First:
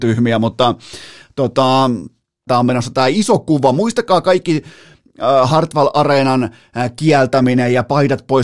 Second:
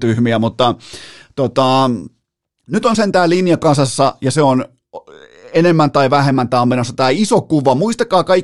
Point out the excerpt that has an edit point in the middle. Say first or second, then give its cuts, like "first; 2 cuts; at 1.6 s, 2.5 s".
first; 1 cut; at 2.5 s